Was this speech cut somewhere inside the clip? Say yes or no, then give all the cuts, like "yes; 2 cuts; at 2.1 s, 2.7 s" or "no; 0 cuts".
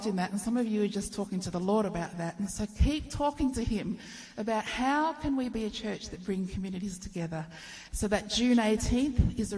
yes; 1 cut; at 7.9 s